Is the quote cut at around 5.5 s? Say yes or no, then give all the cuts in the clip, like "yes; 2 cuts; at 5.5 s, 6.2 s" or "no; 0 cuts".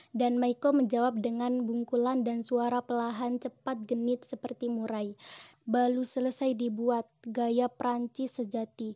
yes; 1 cut; at 5.5 s